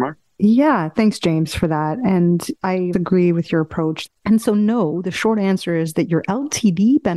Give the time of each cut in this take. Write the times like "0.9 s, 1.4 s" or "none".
2.9 s, 4.1 s